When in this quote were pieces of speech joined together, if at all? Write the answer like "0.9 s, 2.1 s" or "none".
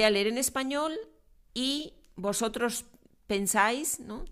none